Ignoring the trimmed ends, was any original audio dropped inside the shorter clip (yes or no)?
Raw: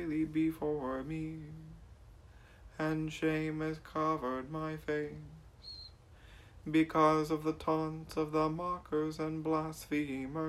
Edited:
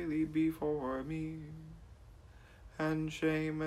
no